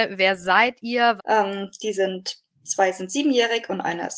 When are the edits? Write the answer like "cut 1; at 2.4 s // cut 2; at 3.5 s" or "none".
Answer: cut 1; at 1.2 s